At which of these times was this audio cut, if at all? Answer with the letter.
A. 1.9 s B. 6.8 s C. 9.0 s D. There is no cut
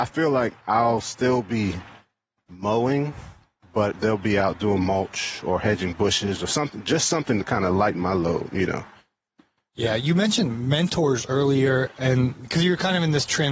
D